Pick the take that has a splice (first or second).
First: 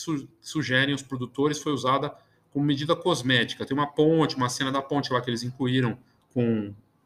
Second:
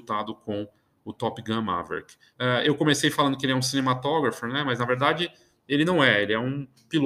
second